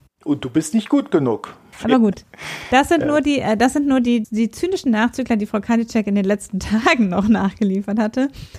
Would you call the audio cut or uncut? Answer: cut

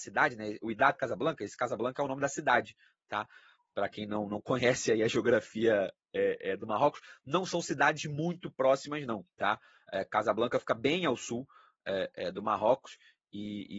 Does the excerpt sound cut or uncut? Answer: cut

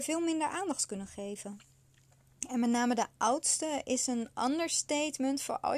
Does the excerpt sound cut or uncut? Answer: cut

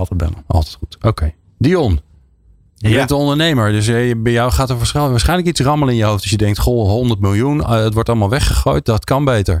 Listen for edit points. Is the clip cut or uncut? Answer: uncut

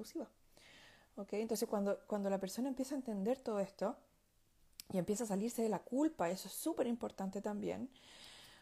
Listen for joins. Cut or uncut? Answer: uncut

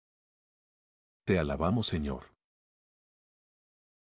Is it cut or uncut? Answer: cut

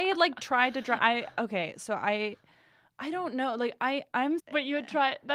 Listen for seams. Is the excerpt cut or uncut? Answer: cut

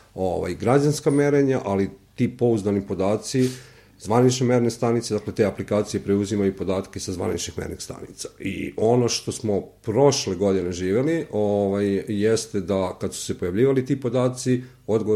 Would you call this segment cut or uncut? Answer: uncut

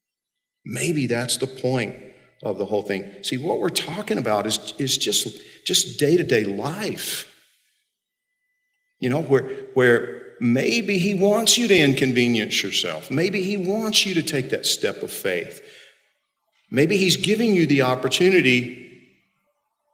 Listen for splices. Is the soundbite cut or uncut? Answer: uncut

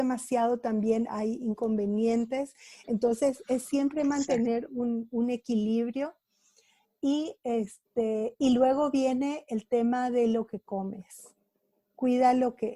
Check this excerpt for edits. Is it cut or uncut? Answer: uncut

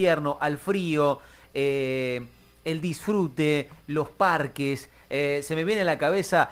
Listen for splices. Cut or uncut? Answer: uncut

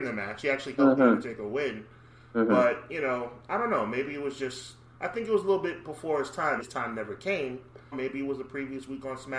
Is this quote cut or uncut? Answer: cut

